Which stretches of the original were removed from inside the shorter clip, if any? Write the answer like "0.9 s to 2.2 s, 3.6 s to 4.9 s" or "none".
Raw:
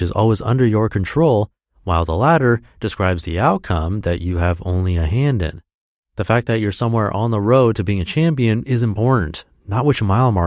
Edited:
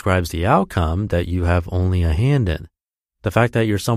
none